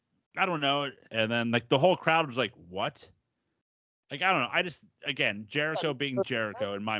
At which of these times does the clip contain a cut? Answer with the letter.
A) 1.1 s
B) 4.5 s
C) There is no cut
A